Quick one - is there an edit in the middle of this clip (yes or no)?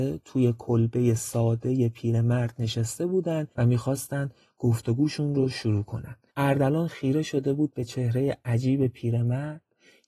yes